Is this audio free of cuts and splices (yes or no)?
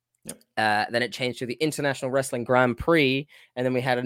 yes